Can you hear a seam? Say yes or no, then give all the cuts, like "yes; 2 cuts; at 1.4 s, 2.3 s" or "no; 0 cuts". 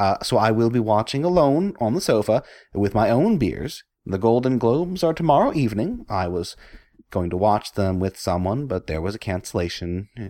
yes; 1 cut; at 4.0 s